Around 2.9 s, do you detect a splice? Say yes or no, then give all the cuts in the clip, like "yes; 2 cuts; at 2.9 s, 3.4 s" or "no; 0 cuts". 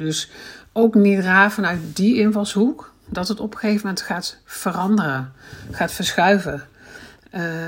no; 0 cuts